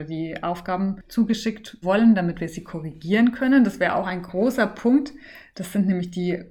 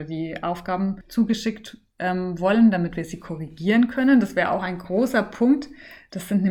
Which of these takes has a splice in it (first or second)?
first